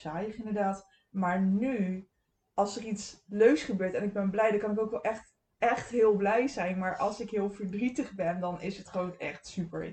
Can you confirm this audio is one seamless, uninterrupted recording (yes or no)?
yes